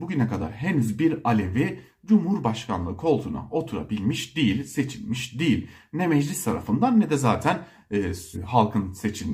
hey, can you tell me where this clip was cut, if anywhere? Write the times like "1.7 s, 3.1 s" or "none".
8.3 s